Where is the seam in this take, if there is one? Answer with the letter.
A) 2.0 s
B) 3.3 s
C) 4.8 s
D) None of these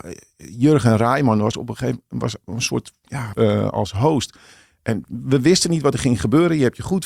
B